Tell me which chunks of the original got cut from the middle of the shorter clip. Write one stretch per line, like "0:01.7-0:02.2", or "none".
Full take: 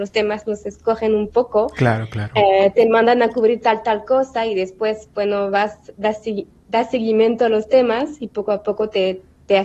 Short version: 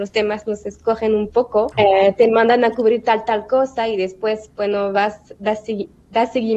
0:01.7-0:02.3